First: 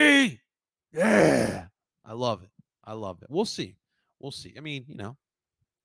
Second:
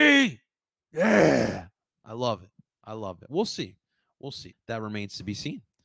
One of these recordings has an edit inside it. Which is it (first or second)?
second